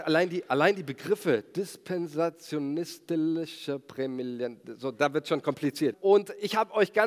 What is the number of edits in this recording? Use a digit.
1